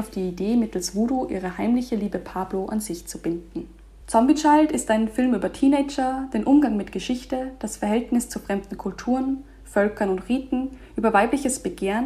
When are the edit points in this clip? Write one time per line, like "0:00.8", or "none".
0:04.0

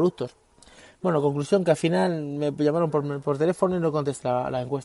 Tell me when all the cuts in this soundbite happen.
none

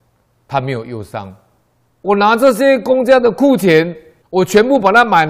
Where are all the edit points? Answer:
0:01.9
0:04.2

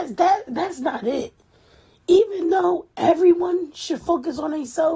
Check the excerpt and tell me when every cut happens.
none

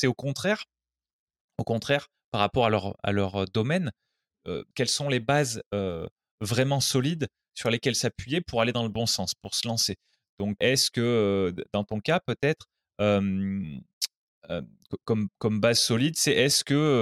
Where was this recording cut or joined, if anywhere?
0:04.7
0:10.6

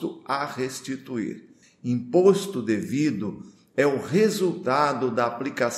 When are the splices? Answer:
0:01.6

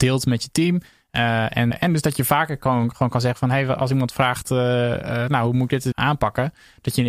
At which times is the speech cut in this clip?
0:01.7
0:05.9

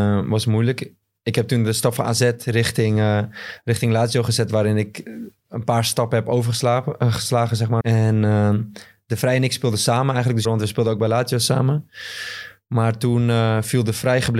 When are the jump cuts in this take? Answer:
0:07.8
0:10.4

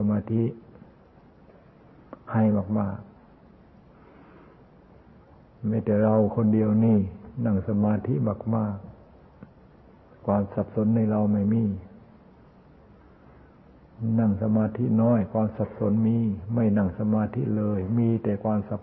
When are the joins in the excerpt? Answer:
none

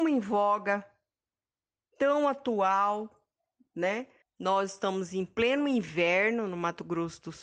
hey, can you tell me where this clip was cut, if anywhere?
0:04.2

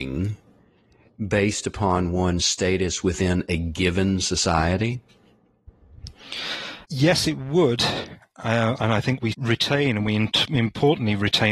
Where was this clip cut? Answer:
0:06.8
0:09.3

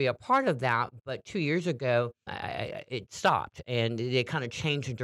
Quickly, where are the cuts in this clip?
0:02.3

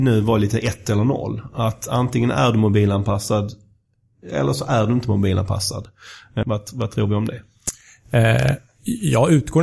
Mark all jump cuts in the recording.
0:06.4

